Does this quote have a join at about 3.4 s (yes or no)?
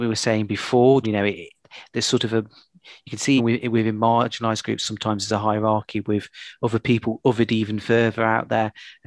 yes